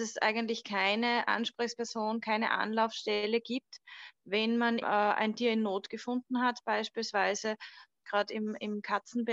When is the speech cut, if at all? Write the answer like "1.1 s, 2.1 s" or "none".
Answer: 4.8 s, 8.0 s

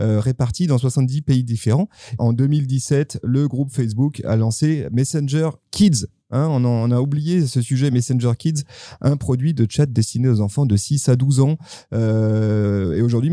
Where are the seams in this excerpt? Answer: 2.2 s

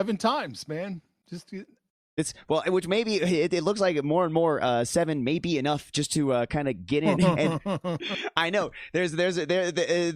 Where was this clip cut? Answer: none

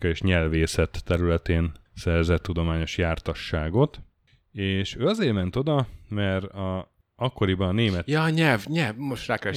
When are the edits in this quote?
1.9 s

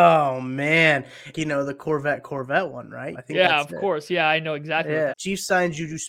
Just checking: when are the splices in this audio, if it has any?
1.3 s, 3.1 s, 5.1 s

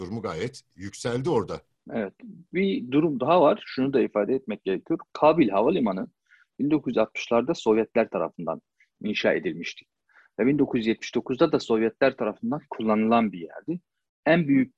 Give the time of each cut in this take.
none

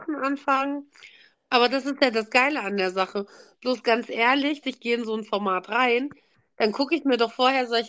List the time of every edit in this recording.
1.3 s, 4.6 s

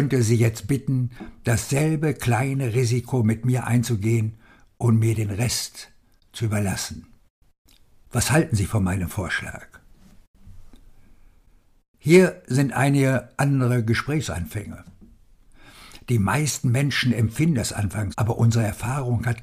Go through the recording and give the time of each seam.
18.1 s

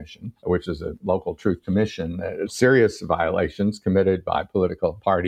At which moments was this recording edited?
2.5 s

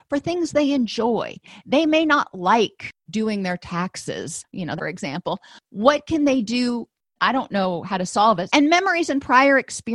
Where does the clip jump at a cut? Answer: 4.8 s, 7.2 s, 8.5 s

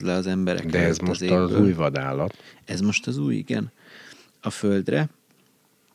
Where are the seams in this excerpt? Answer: none

